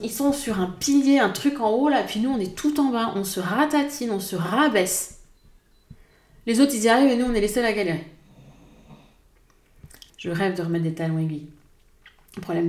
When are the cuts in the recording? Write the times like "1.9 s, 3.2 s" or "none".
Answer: 10.1 s